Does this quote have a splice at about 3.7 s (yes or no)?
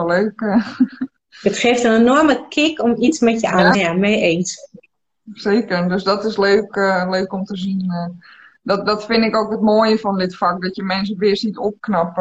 yes